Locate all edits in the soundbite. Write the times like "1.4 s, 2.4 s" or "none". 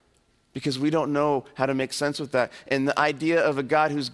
none